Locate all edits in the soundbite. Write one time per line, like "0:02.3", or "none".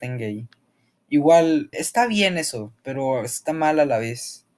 0:01.7